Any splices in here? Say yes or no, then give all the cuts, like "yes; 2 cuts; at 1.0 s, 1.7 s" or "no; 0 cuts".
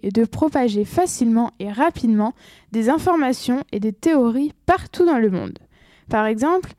no; 0 cuts